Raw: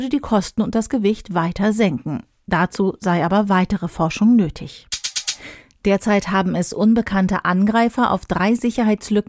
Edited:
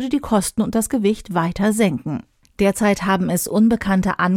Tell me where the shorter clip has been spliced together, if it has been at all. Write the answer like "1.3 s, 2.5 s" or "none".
2.4 s